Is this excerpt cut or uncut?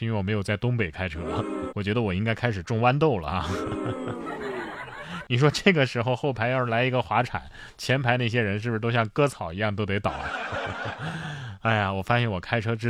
cut